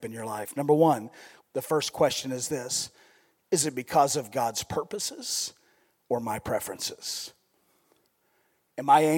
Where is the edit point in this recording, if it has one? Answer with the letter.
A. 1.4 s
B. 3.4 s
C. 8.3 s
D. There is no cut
A